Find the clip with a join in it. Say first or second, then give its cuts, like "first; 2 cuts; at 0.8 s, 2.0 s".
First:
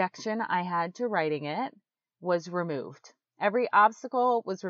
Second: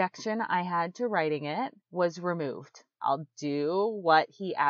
second; 2 cuts; at 1.8 s, 3.0 s